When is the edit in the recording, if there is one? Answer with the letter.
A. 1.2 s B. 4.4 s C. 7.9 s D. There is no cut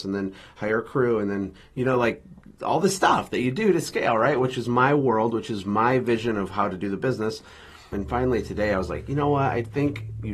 C